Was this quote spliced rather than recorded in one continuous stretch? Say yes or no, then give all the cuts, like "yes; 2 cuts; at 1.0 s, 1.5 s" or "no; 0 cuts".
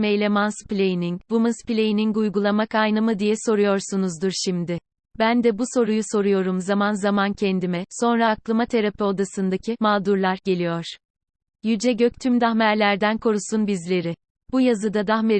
no; 0 cuts